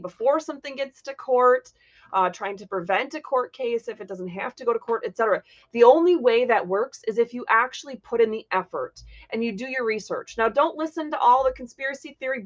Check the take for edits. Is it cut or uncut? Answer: uncut